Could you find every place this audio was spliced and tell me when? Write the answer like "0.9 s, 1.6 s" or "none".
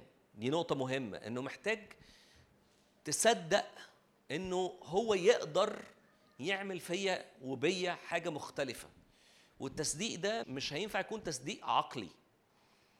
10.4 s